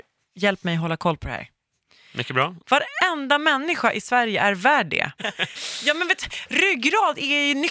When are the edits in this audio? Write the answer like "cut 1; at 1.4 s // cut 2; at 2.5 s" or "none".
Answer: cut 1; at 2.6 s // cut 2; at 5.2 s